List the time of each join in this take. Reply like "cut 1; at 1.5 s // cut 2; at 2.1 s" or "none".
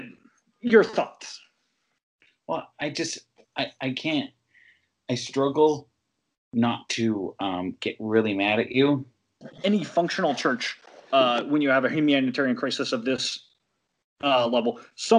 cut 1; at 9.4 s